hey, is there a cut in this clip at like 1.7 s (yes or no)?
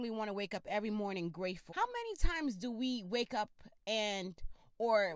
yes